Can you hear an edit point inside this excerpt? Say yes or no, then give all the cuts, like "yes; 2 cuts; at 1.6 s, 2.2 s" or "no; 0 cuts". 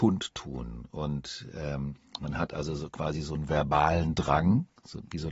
no; 0 cuts